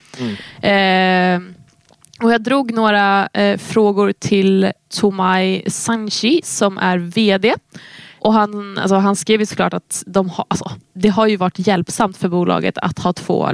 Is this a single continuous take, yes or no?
yes